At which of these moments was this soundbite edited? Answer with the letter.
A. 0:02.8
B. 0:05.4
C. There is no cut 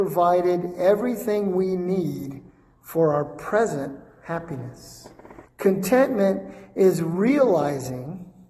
B